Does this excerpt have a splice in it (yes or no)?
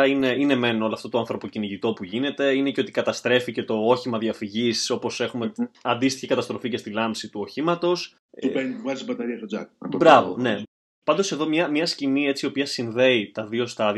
no